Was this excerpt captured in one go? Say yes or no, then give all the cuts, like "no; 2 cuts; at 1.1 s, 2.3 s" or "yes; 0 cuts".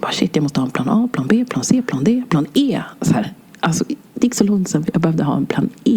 yes; 0 cuts